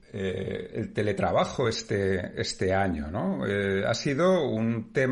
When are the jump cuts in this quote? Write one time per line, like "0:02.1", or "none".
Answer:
none